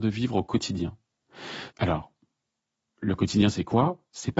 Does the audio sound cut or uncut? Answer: cut